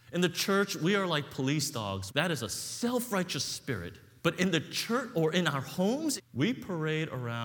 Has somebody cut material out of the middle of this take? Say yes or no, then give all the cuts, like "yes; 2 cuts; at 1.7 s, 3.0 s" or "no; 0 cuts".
yes; 3 cuts; at 2.1 s, 4.2 s, 6.2 s